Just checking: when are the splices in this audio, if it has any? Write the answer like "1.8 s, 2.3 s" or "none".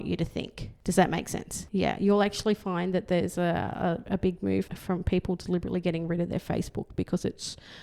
1.7 s, 4.7 s